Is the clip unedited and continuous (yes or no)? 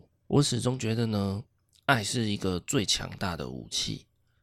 yes